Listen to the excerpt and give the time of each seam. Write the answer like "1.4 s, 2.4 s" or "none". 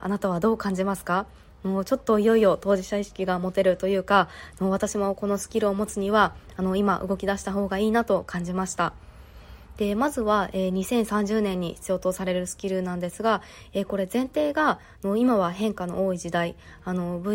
none